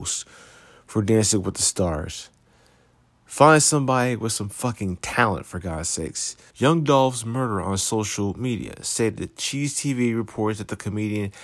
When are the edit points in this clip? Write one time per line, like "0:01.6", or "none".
0:06.5